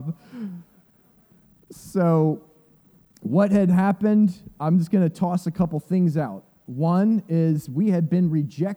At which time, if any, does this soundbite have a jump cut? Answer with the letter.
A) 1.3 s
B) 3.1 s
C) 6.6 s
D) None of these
D